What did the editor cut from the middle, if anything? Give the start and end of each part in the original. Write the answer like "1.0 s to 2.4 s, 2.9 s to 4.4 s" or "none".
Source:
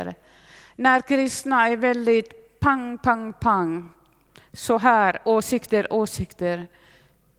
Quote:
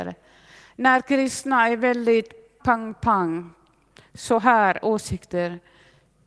2.6 s to 3.0 s, 5.2 s to 5.9 s